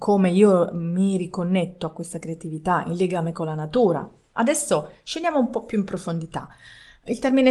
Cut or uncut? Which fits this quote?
uncut